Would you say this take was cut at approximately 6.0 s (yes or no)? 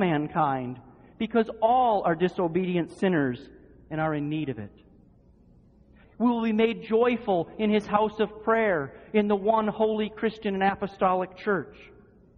yes